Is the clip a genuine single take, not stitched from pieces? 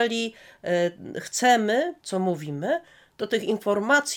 no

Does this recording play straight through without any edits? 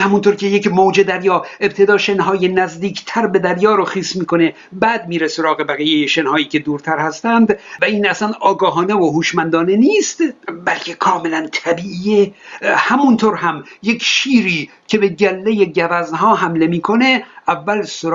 yes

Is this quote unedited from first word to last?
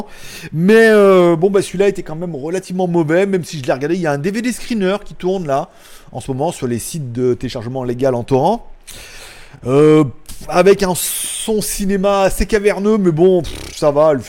yes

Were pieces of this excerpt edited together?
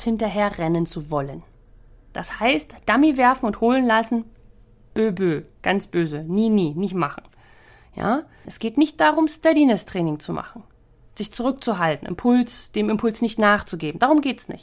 yes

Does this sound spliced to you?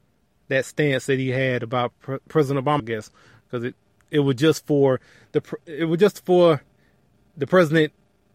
yes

